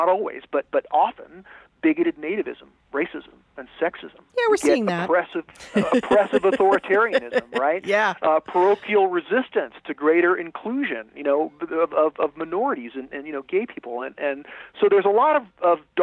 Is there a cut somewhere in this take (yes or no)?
no